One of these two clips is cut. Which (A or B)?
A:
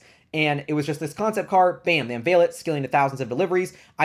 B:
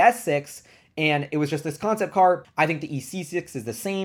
B